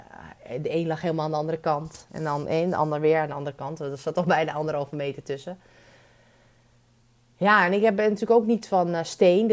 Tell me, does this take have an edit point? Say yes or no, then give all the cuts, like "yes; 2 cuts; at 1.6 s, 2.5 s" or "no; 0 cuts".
no; 0 cuts